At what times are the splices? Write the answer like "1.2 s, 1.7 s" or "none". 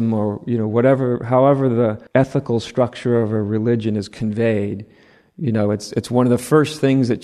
2.1 s